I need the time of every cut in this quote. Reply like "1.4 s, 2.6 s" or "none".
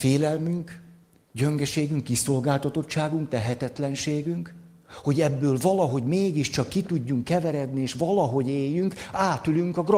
none